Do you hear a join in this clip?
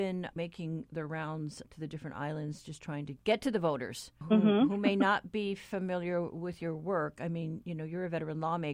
no; 0 cuts

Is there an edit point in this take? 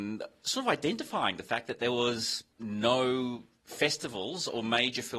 yes; 1 cut; at 2.5 s

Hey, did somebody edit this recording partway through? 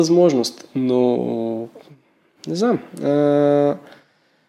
no; 0 cuts

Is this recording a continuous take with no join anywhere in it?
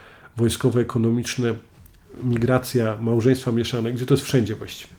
yes; 0 cuts

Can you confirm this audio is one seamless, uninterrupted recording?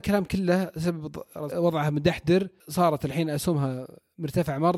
no; 1 cut; at 1.5 s

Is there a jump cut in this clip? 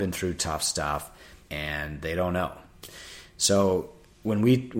yes; 1 cut; at 1.4 s

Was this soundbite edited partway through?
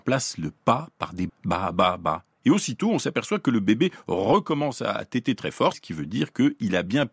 yes; 2 cuts; at 1.3 s, 5.7 s

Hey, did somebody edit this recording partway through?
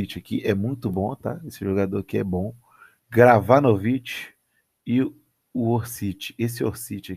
yes; 1 cut; at 3.0 s

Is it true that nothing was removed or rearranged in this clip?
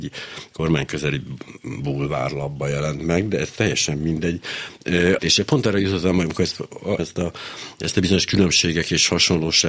no; 2 cuts; at 5.2 s, 7.0 s

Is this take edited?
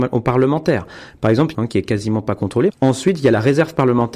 yes; 2 cuts; at 1.5 s, 2.7 s

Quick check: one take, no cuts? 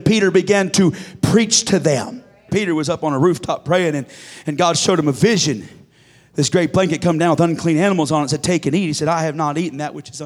no; 1 cut; at 2.5 s

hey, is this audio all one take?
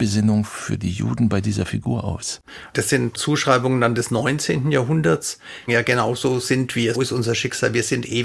no; 2 cuts; at 5.7 s, 6.9 s

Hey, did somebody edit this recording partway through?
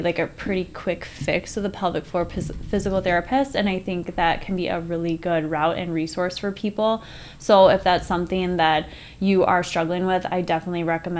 no; 0 cuts

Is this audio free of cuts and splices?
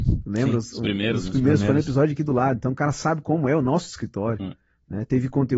yes; 0 cuts

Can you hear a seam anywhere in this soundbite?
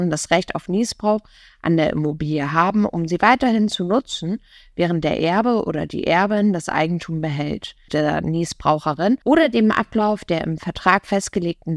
yes; 2 cuts; at 7.9 s, 9.2 s

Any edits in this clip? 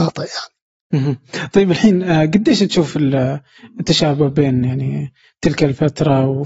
no; 0 cuts

